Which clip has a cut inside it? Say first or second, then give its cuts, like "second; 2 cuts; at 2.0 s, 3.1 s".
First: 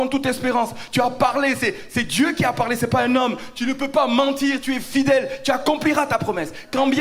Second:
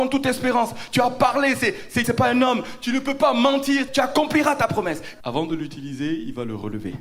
second; 3 cuts; at 2.0 s, 3.9 s, 5.2 s